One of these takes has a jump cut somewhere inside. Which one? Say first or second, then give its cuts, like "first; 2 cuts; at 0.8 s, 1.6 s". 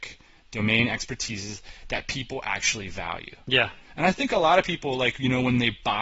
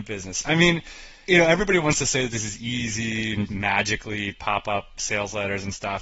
second; 2 cuts; at 1.3 s, 3.5 s